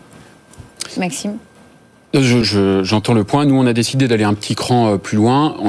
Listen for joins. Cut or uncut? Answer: cut